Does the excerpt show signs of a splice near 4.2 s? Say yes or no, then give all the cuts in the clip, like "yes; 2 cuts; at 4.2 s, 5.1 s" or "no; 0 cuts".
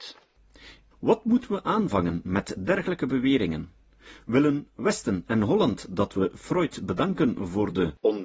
no; 1 cut; at 0.9 s